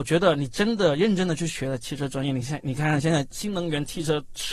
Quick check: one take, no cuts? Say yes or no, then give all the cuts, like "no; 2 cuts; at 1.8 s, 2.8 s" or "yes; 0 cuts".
yes; 0 cuts